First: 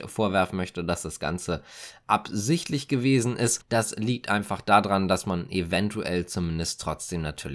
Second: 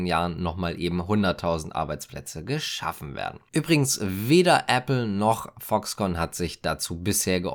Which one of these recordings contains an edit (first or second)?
first